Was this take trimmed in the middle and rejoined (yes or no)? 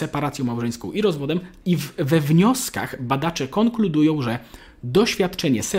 yes